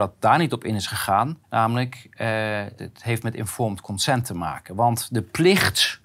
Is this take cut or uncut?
cut